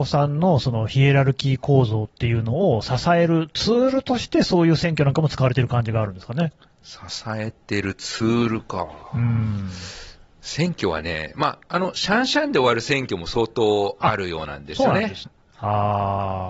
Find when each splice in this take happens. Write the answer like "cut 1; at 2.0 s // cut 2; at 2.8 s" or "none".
cut 1; at 15.2 s